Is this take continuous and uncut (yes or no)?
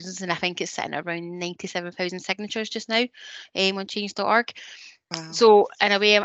yes